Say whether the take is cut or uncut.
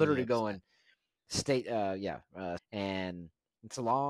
cut